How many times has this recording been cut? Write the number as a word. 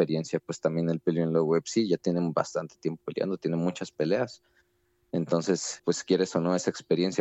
one